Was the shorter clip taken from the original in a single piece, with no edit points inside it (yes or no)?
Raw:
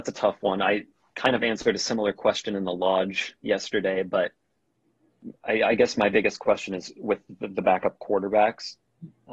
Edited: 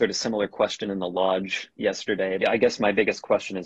no